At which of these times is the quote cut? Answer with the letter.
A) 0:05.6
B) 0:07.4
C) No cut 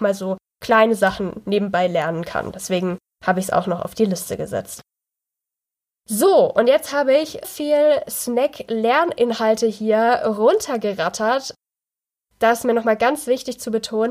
B